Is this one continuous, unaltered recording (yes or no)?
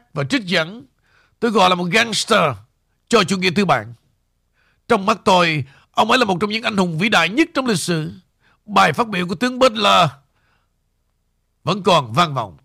yes